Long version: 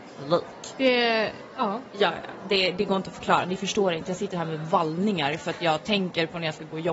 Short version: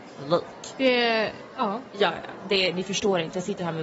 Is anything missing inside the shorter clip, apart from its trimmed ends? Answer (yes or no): yes